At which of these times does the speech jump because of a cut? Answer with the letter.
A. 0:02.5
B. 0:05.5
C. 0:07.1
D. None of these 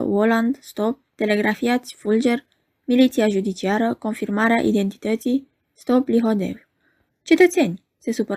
C